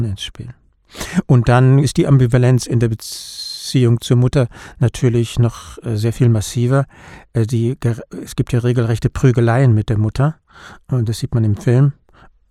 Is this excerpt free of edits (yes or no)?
no